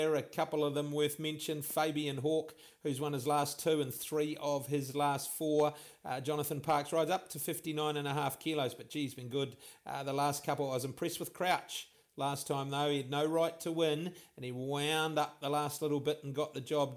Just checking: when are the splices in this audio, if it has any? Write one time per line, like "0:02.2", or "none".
none